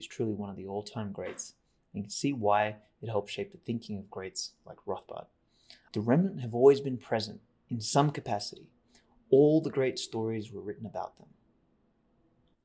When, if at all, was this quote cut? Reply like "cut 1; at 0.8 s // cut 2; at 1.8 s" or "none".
cut 1; at 5.9 s